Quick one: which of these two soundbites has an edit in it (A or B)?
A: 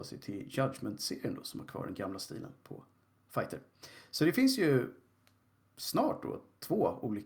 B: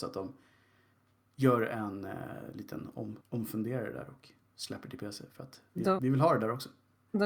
B